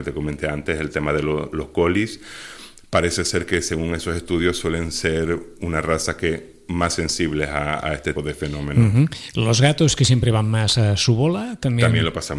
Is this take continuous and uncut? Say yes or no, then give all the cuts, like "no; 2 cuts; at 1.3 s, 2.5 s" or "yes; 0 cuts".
no; 1 cut; at 8.2 s